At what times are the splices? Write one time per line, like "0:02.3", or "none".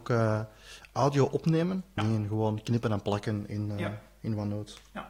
0:02.0